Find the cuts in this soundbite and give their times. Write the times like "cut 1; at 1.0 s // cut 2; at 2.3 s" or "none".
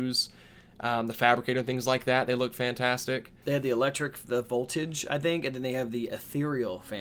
cut 1; at 3.4 s